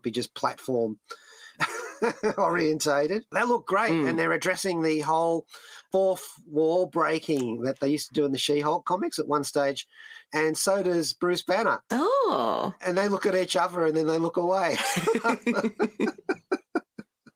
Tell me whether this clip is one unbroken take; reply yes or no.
no